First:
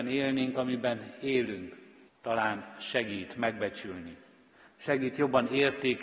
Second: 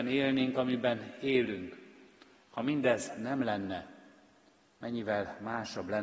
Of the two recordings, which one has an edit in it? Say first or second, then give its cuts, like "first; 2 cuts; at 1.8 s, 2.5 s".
first; 2 cuts; at 2.1 s, 4.7 s